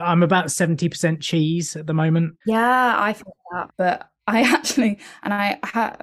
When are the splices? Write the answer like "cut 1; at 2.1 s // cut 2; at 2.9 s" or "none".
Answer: cut 1; at 2.4 s // cut 2; at 3.7 s